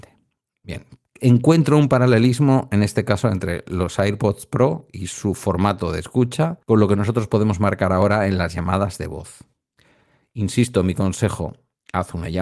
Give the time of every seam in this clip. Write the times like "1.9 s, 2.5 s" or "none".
6.6 s